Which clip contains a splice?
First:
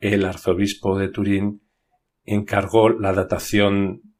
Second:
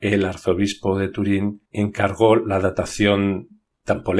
second; 1 cut; at 1.7 s

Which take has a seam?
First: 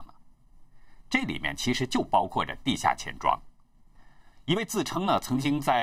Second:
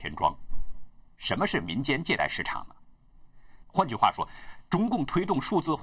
second; 2 cuts; at 1.1 s, 3.6 s

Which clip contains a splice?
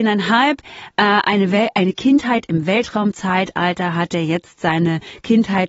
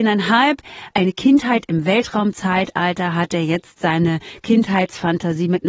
second; 1 cut; at 0.9 s

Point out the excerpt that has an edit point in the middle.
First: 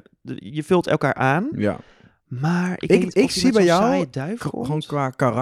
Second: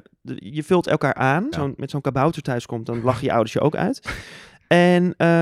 second; 1 cut; at 1.5 s

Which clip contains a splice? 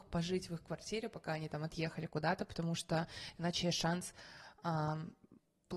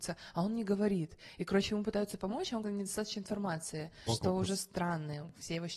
second; 2 cuts; at 2.6 s, 4.1 s

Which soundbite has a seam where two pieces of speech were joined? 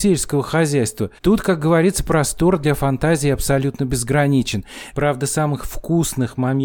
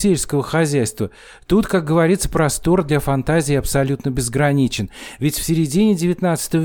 first; 2 cuts; at 1.2 s, 4.9 s

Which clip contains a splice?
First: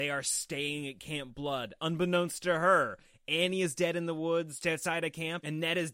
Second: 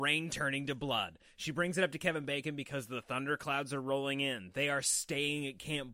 first; 1 cut; at 4.6 s

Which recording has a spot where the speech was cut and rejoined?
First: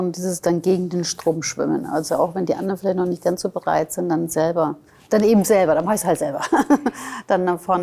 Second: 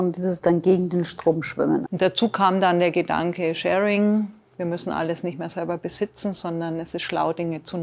second; 1 cut; at 1.9 s

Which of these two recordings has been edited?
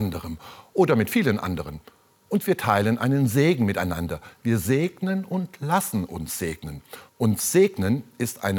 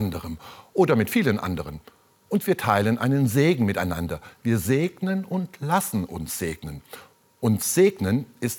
first; 1 cut; at 7.1 s

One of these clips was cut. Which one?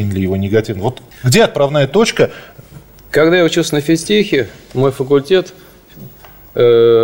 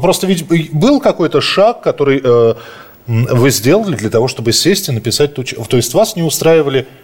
first; 1 cut; at 1.1 s

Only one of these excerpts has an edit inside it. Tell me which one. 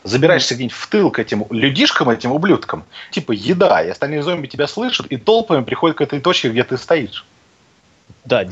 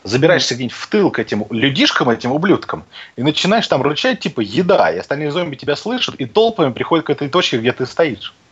first; 1 cut; at 3.1 s

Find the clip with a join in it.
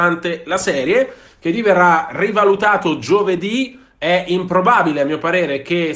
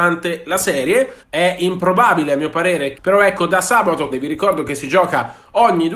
second; 3 cuts; at 1.2 s, 2.9 s, 4.1 s

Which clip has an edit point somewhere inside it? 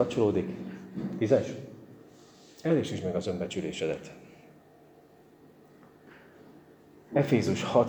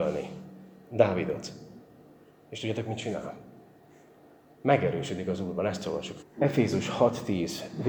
second; 1 cut; at 6.2 s

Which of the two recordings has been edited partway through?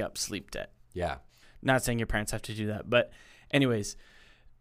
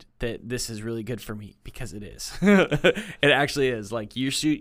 first; 1 cut; at 1.4 s

